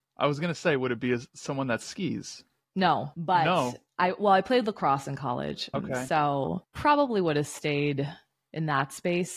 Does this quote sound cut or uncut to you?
uncut